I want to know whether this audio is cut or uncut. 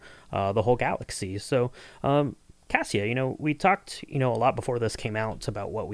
uncut